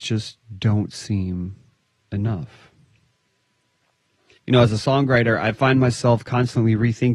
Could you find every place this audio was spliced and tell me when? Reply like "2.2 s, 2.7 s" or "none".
4.4 s